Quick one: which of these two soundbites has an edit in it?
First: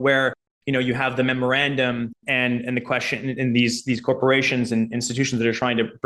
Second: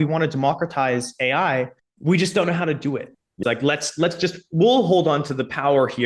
second; 1 cut; at 3.4 s

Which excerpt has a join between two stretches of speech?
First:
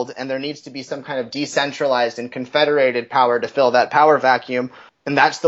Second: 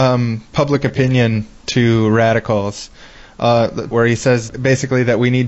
second; 1 cut; at 3.9 s

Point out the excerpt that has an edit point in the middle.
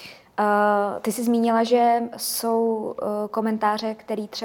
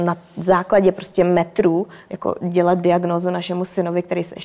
second; 1 cut; at 2.1 s

